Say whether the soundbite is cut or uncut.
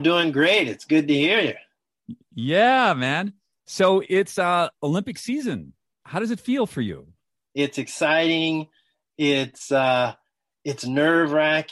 cut